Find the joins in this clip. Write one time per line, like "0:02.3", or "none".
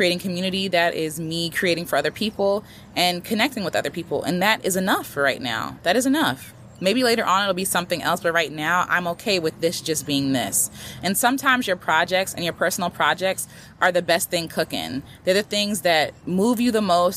none